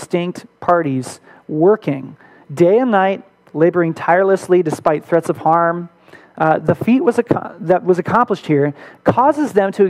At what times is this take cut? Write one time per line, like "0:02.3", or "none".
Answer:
none